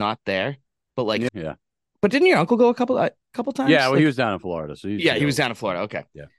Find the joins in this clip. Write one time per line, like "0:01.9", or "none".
0:01.3